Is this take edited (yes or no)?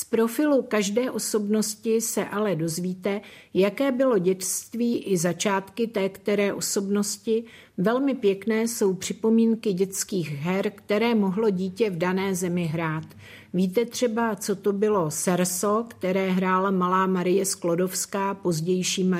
no